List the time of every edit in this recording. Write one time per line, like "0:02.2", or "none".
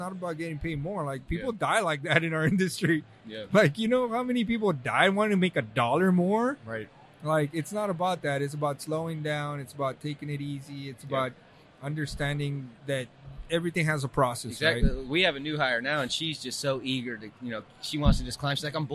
0:12.8